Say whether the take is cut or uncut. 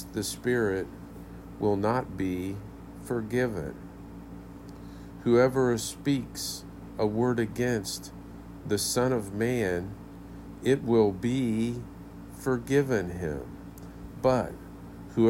uncut